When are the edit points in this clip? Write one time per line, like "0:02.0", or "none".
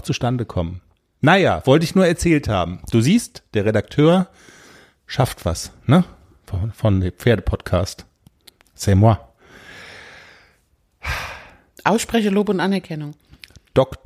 none